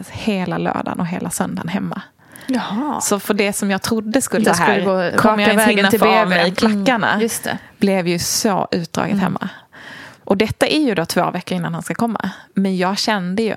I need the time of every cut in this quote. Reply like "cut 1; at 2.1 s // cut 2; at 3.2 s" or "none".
cut 1; at 4.4 s